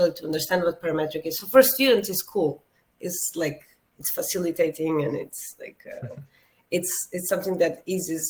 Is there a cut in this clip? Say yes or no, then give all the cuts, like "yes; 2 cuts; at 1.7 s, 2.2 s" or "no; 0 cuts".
no; 0 cuts